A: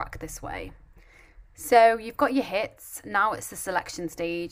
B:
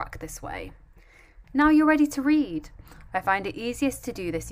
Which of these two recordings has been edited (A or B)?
B